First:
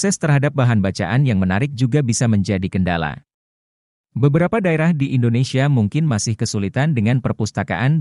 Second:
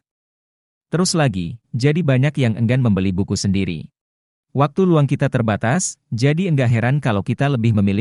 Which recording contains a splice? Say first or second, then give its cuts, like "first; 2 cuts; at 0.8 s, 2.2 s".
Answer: second; 2 cuts; at 1.6 s, 4.4 s